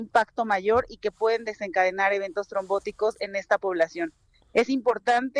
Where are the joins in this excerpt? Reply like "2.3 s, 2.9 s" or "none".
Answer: none